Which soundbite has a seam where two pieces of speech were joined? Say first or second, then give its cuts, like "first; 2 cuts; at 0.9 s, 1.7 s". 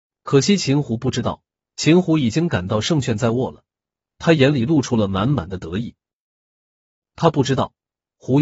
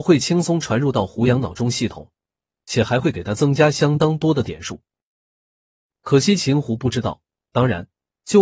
first; 1 cut; at 1.6 s